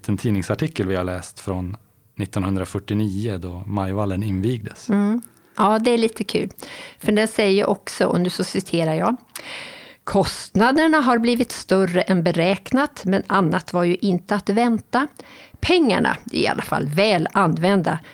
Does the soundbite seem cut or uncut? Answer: uncut